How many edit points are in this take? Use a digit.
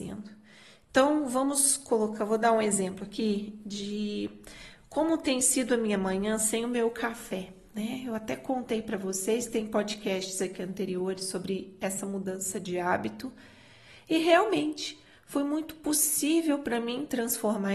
0